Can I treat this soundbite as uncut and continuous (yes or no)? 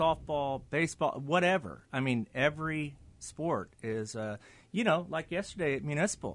yes